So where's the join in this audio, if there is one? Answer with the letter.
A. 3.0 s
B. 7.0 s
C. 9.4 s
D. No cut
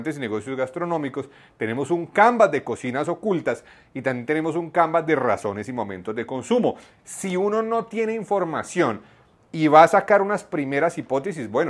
B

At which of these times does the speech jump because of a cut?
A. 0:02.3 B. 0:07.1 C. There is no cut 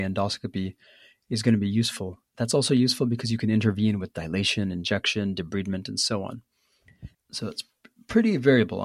B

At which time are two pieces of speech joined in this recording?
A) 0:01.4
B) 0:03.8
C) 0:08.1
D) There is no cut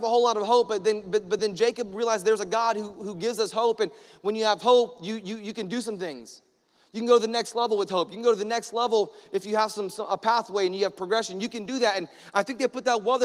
D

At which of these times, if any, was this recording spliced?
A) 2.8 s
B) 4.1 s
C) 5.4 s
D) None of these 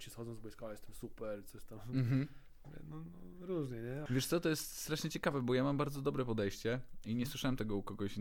B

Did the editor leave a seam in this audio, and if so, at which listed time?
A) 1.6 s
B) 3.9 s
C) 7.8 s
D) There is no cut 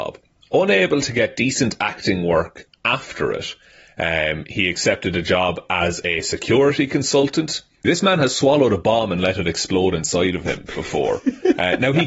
C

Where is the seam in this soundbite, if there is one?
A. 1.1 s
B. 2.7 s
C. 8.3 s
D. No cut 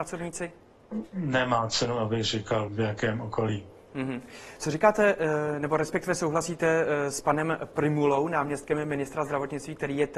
B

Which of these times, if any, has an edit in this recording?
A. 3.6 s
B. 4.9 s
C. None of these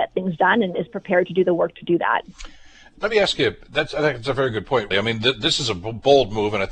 B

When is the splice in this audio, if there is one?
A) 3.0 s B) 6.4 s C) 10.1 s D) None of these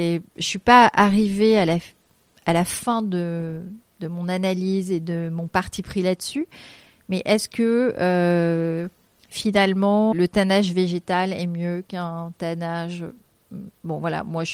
C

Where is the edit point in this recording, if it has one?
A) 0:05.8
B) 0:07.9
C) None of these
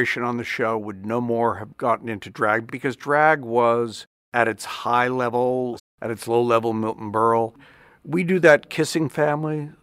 A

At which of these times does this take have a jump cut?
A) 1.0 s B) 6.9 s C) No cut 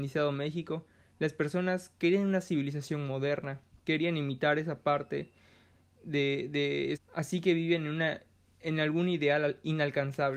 B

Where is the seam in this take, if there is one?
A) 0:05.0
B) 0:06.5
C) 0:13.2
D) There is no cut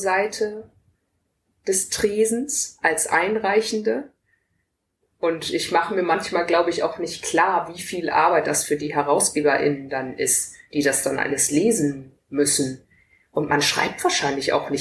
A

